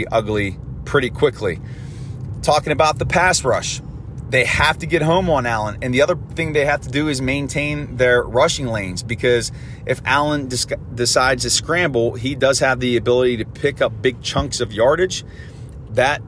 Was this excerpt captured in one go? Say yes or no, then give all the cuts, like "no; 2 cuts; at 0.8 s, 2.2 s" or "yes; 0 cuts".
yes; 0 cuts